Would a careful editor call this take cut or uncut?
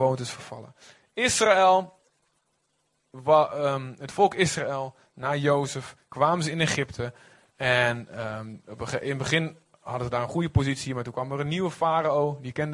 uncut